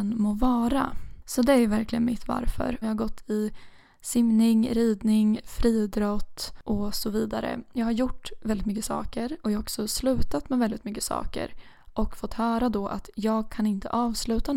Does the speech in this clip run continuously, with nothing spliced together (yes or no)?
no